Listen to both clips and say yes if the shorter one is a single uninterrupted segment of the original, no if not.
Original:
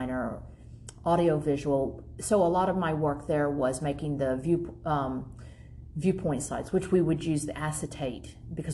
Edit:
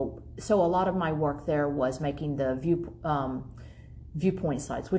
yes